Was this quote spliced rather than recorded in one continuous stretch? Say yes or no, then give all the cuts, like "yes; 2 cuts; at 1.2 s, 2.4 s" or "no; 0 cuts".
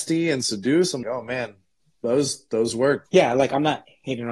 yes; 2 cuts; at 1.0 s, 3.1 s